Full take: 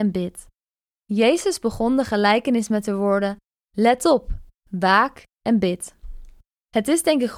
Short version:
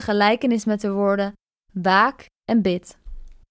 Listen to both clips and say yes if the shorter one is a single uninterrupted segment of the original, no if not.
no